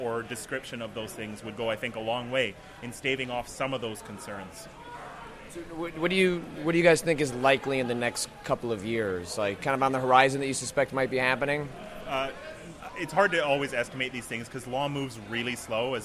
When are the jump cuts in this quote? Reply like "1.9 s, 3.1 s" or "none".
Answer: 9.6 s